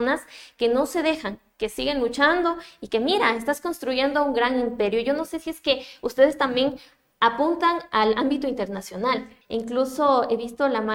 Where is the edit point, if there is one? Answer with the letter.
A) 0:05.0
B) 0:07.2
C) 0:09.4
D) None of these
C